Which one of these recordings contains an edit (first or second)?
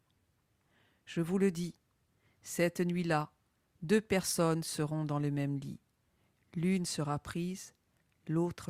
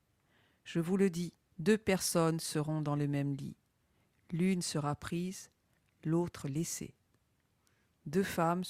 second